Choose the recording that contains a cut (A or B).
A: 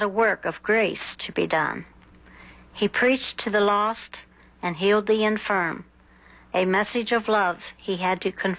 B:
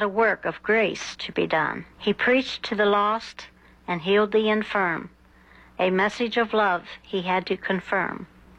B